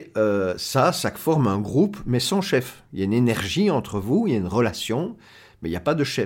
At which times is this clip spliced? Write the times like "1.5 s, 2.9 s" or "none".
none